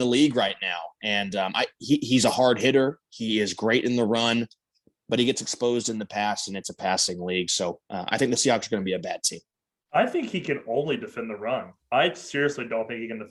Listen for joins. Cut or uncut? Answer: uncut